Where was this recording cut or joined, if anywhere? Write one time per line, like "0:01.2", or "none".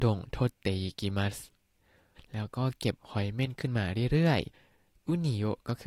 0:02.2
0:04.5